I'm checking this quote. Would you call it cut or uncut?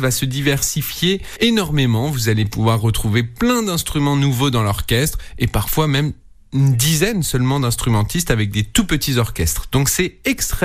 uncut